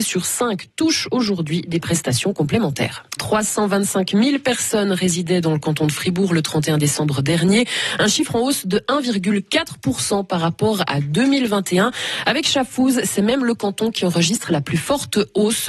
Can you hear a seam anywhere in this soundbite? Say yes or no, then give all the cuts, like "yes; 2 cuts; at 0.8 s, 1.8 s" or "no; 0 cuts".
yes; 1 cut; at 3.2 s